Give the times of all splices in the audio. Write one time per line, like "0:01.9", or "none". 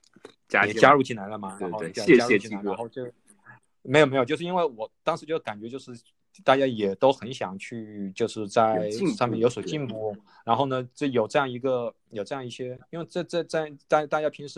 none

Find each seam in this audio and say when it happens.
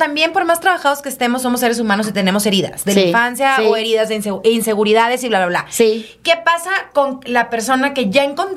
none

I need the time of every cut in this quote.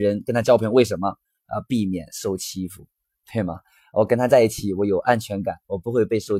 none

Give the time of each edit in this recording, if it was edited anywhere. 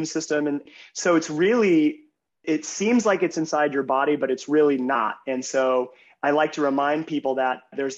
none

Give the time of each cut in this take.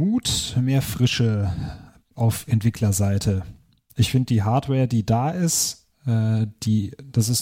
none

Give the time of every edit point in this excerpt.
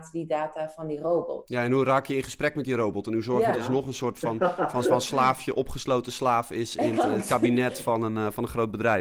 0:03.5
0:04.8
0:06.9

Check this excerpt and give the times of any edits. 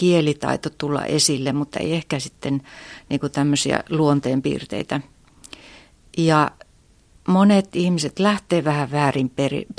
none

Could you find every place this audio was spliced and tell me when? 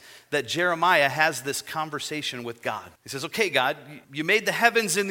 0:03.0
0:04.0

